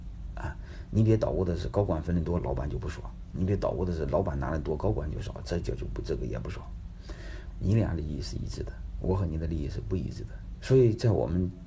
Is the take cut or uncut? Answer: cut